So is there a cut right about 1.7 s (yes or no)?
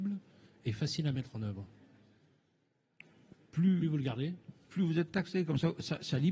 no